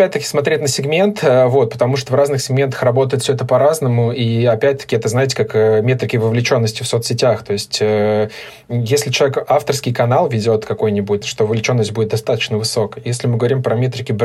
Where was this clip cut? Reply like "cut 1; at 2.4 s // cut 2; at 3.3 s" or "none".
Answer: cut 1; at 11.2 s